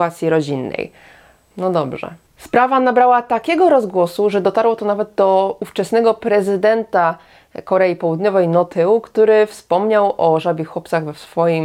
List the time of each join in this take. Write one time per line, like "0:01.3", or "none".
0:01.5

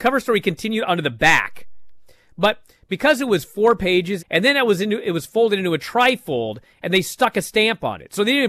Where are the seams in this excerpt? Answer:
0:04.2

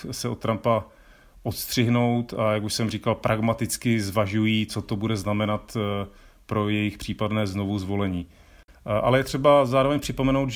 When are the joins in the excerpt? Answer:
0:08.7

